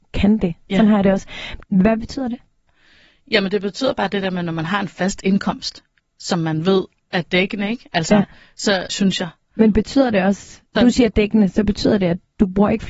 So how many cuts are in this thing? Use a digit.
3